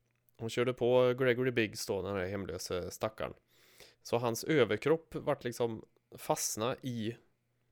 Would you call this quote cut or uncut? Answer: uncut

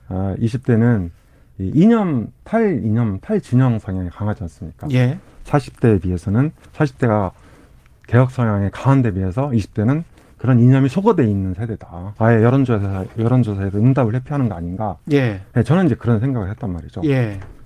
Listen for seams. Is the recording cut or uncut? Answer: cut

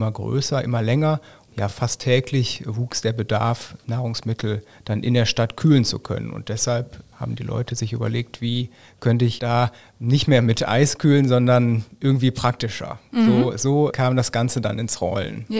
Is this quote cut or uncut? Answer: uncut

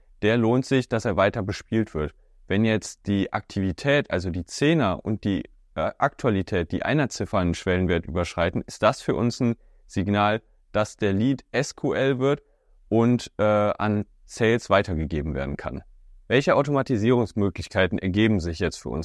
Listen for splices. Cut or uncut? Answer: uncut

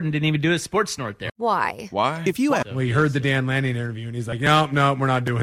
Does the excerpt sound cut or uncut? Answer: cut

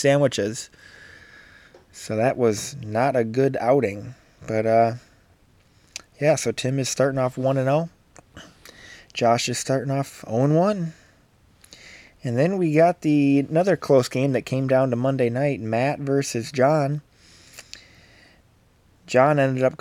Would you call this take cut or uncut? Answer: uncut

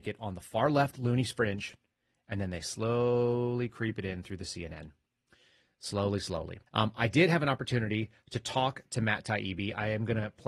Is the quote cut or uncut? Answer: cut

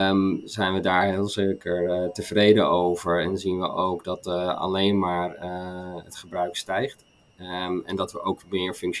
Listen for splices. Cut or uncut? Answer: uncut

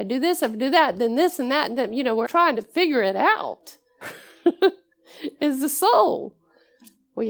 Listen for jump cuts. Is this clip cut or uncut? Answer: cut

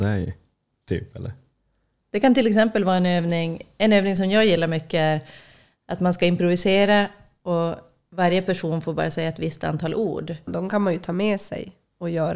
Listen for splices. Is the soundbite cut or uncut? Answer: cut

